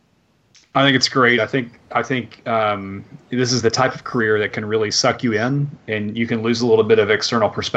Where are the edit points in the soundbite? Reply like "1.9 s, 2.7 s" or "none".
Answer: none